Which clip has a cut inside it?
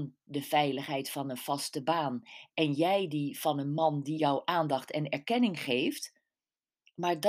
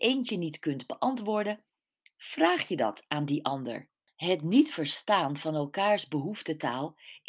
second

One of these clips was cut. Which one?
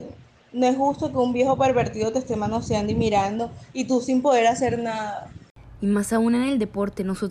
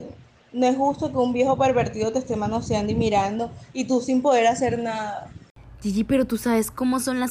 first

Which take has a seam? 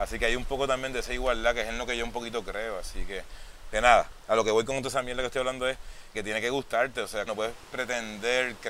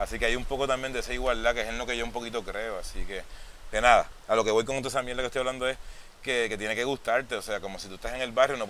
first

